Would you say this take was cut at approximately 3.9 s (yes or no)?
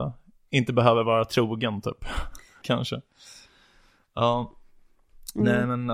no